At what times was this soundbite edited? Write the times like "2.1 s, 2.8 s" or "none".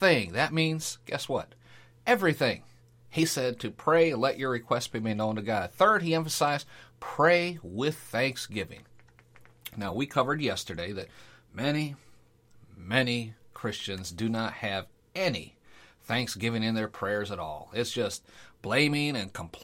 none